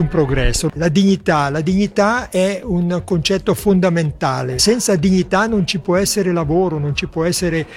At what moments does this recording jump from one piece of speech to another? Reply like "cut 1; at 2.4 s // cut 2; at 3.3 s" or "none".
none